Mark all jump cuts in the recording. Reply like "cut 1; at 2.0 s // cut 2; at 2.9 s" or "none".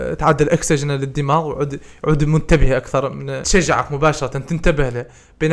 cut 1; at 3.4 s